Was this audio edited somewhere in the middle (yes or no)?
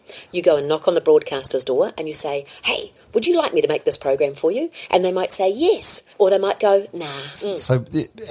yes